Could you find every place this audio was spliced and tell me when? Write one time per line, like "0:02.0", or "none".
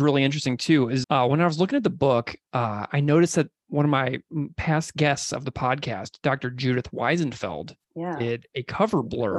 0:01.0